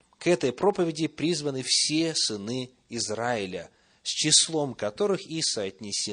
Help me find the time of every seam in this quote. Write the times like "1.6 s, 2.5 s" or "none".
none